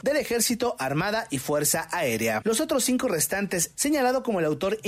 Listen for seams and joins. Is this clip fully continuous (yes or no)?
no